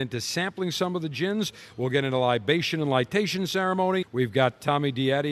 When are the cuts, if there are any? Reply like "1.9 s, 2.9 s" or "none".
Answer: 4.0 s